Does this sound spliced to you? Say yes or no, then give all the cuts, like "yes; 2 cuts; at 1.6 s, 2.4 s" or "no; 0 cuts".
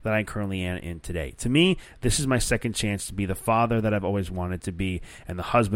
no; 0 cuts